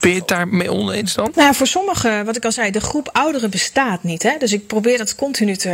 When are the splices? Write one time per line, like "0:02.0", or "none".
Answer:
0:01.3